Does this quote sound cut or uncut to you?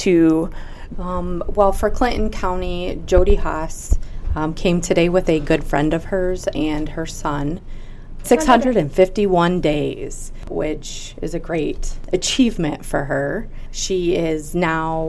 cut